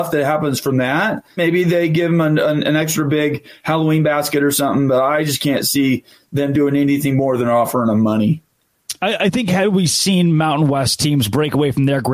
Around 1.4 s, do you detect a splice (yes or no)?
yes